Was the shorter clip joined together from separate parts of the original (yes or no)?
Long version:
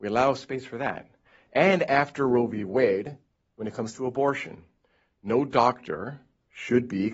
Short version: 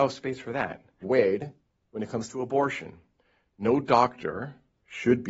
yes